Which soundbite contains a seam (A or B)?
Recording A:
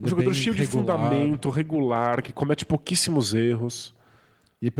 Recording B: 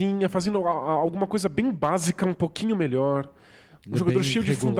A